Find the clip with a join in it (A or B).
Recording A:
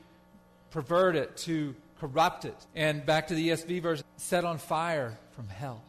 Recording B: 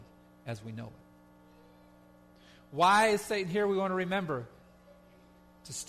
A